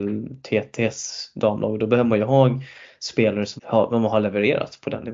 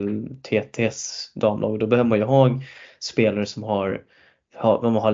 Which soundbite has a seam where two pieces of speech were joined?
first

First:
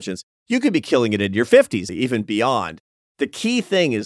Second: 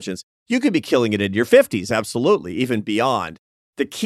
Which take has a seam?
first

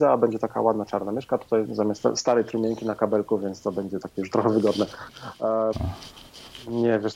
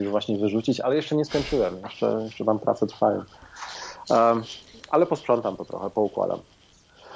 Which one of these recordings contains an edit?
first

